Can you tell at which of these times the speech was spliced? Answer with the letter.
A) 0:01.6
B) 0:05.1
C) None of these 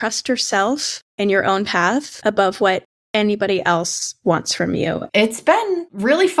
B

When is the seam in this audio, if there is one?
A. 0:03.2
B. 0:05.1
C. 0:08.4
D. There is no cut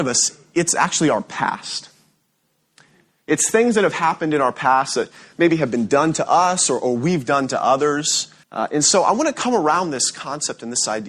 C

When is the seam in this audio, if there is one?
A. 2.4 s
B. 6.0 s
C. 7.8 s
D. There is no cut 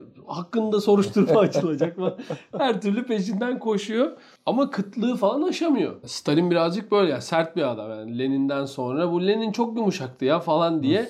B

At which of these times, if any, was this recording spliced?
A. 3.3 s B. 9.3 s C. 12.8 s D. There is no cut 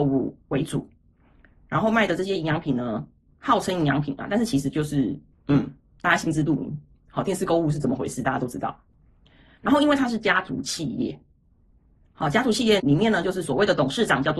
C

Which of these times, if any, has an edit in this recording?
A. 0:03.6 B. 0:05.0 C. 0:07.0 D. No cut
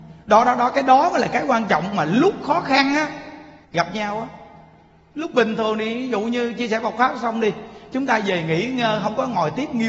A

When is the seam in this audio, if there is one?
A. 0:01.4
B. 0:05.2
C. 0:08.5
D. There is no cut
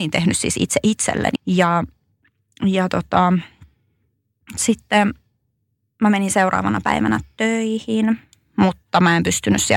A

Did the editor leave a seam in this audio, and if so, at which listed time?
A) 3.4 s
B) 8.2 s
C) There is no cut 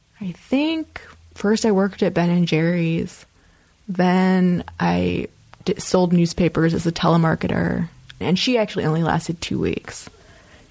B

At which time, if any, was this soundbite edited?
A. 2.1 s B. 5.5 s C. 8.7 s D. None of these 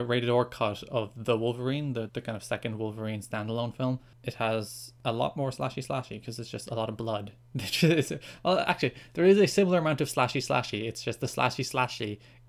A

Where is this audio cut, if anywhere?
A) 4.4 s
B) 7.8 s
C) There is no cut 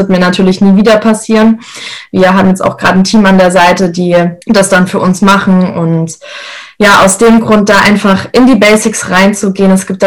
A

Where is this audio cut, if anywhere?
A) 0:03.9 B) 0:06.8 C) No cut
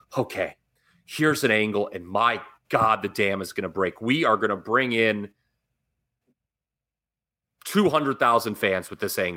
C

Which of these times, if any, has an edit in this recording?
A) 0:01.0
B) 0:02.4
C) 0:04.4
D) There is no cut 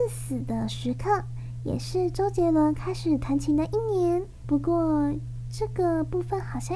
C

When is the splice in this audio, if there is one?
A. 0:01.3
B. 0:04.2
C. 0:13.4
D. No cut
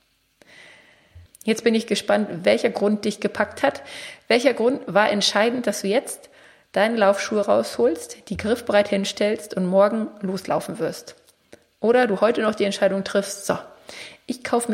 A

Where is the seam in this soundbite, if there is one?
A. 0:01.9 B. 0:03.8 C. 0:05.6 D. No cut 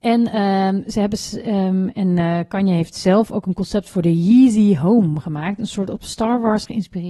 D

